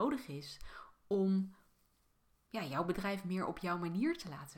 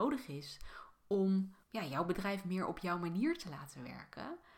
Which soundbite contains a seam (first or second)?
second